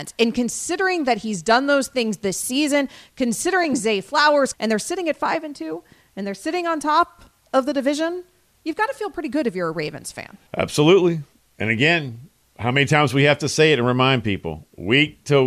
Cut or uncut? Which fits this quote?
cut